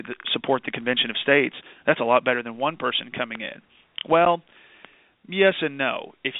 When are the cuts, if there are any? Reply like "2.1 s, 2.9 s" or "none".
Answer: none